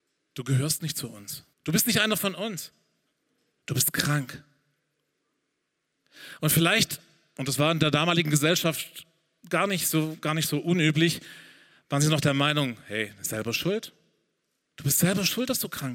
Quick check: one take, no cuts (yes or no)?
no